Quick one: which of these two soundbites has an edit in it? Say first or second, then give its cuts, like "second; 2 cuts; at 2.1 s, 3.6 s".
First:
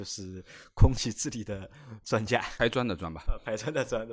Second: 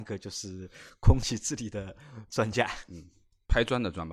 first; 1 cut; at 2.6 s